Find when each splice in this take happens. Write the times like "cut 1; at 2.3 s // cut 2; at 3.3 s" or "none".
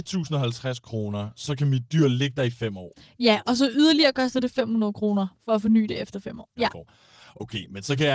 cut 1; at 5.4 s // cut 2; at 6.5 s